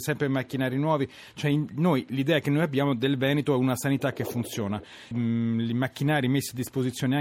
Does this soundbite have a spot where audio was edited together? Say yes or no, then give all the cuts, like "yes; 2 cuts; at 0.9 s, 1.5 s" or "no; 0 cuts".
yes; 1 cut; at 5.1 s